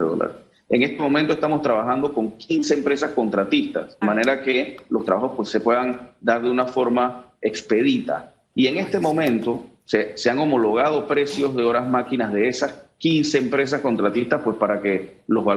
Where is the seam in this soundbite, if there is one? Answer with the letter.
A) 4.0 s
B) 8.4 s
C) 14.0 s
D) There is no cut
A